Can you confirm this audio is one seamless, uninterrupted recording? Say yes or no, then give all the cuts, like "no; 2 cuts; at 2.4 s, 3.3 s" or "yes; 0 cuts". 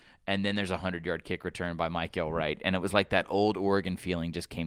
yes; 0 cuts